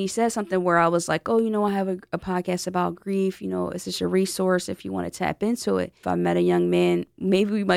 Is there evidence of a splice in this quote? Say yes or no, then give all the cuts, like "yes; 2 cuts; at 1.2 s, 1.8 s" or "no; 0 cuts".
yes; 1 cut; at 6.0 s